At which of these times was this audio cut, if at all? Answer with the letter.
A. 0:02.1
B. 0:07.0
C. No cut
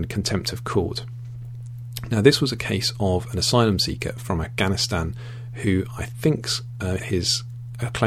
B